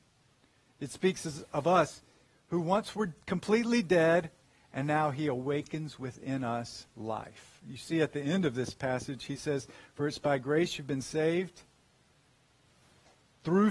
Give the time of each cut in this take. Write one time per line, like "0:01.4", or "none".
none